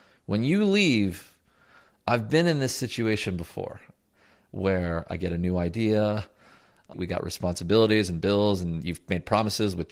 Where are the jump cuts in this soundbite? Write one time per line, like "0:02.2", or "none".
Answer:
0:06.9